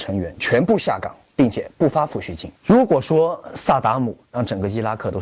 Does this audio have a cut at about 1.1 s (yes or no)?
no